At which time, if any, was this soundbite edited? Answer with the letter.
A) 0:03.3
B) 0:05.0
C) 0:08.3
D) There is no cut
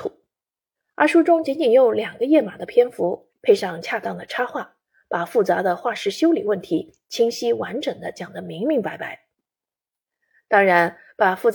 A